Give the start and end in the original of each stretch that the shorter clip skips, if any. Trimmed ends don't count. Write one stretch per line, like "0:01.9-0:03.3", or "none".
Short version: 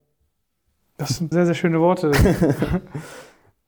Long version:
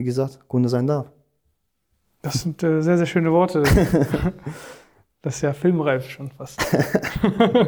0:02.6-0:02.8